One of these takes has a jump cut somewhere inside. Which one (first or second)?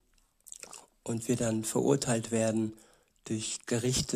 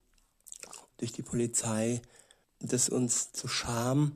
second